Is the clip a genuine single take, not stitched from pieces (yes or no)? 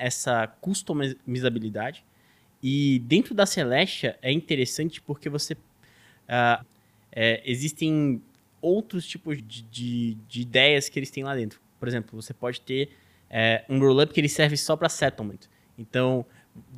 no